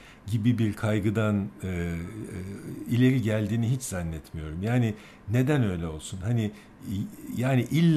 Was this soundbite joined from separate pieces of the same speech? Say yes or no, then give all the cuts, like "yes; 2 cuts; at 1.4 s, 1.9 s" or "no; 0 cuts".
no; 0 cuts